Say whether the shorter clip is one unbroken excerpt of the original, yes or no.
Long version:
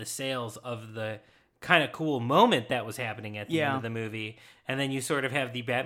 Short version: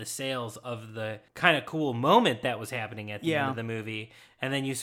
no